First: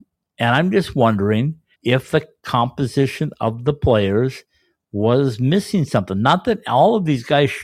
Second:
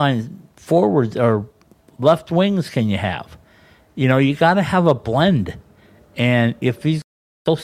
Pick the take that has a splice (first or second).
first